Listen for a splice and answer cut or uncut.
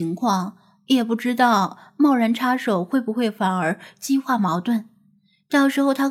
uncut